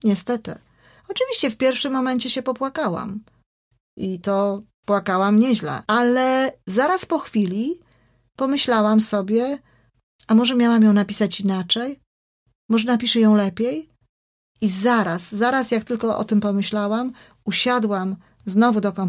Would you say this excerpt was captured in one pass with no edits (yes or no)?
yes